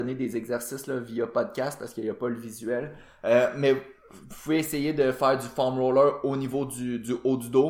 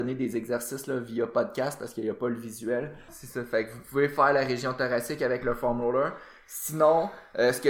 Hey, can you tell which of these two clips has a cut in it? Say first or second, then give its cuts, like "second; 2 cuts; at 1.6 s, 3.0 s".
second; 1 cut; at 3.1 s